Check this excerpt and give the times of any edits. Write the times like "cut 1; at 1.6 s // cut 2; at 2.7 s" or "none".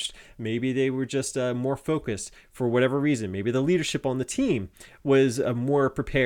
none